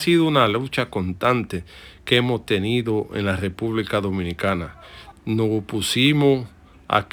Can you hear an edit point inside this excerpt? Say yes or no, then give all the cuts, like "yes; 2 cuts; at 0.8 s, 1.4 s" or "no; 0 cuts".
yes; 1 cut; at 5.1 s